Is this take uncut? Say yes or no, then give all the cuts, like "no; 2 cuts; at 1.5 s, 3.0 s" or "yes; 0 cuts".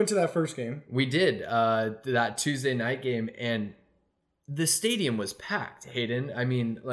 yes; 0 cuts